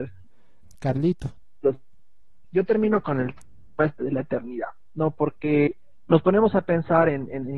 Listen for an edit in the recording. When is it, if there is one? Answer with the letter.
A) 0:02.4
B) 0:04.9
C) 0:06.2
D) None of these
A